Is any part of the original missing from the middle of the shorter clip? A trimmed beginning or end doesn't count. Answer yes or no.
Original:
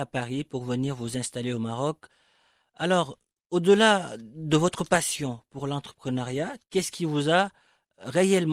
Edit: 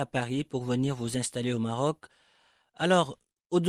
no